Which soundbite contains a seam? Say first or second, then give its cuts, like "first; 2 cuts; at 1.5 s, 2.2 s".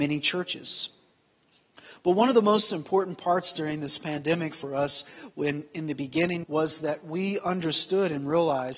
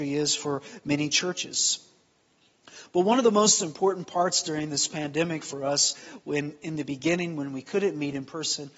first; 1 cut; at 6.4 s